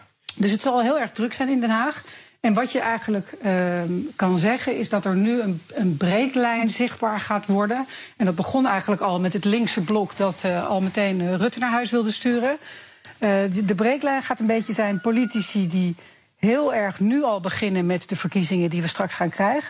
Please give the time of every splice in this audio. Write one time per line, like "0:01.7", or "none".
none